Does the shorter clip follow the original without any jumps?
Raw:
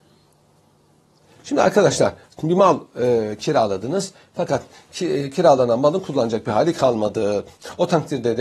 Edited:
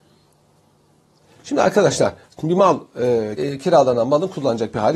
no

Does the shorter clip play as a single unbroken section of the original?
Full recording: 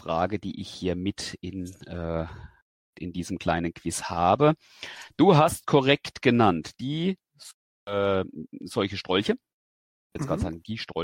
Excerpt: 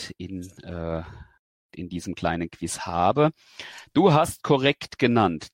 yes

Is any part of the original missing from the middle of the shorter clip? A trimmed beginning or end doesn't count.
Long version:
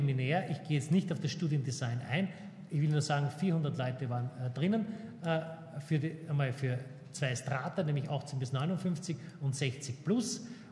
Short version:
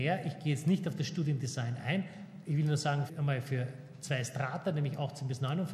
yes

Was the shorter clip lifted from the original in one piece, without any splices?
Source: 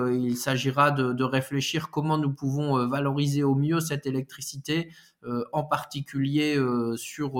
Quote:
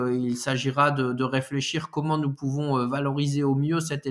yes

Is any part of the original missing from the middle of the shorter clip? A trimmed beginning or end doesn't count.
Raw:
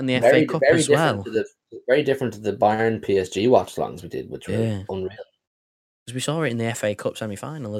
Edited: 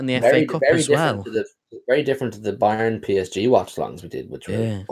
no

